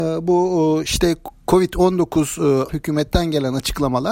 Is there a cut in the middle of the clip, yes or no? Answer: yes